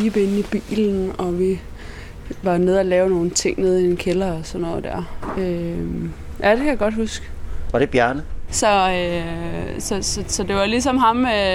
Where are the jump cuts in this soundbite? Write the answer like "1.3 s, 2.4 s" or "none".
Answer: 8.5 s